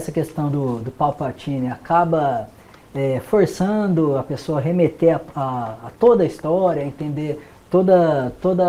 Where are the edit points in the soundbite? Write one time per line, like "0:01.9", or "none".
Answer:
none

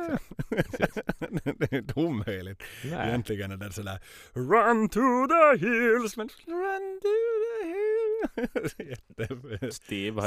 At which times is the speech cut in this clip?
none

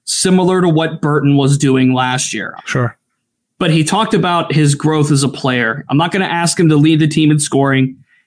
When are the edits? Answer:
0:02.6
0:05.9

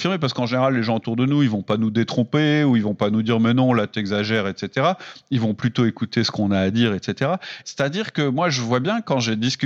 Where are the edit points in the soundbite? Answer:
0:07.6

